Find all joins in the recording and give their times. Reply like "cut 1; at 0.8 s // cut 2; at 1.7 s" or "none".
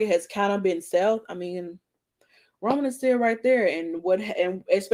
none